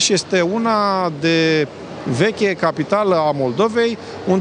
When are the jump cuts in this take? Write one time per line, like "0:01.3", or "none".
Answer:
none